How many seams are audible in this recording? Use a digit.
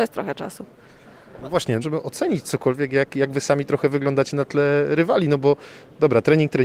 1